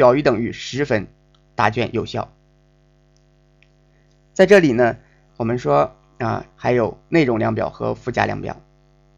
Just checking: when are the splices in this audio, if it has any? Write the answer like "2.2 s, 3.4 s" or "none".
5.3 s, 6.5 s